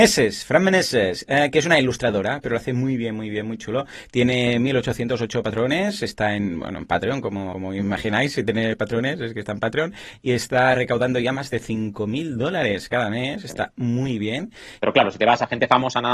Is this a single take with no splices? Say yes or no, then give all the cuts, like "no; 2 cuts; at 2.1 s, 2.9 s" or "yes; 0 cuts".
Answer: no; 1 cut; at 14.8 s